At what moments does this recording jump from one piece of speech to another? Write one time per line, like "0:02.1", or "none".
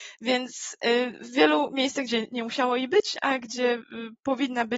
0:02.1